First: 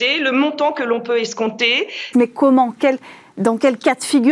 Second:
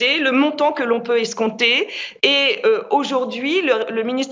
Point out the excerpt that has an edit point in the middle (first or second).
first